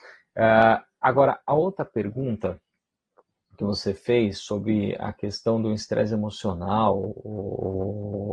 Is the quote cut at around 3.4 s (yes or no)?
no